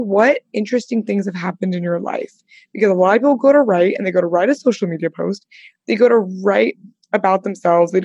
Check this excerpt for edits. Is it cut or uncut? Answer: uncut